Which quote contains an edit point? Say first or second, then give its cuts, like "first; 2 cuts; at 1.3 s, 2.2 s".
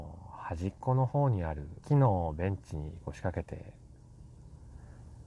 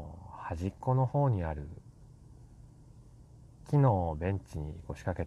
first; 1 cut; at 1.8 s